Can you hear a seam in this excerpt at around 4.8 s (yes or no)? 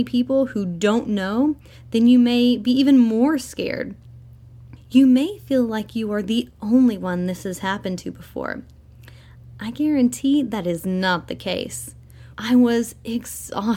yes